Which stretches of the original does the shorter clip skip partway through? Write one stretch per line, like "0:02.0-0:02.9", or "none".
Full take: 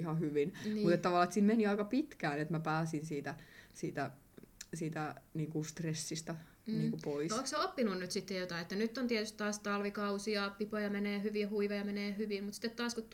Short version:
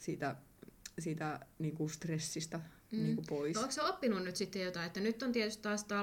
none